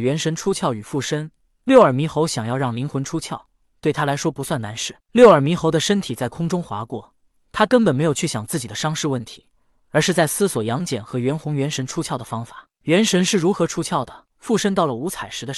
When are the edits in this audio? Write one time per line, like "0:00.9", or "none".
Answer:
0:05.0
0:14.3

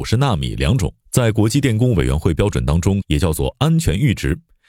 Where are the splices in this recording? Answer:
0:01.0
0:03.0

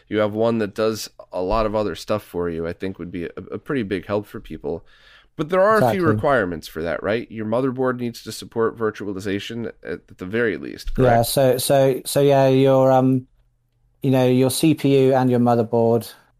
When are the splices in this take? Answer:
none

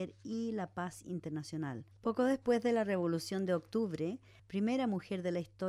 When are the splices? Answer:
0:01.9
0:04.4

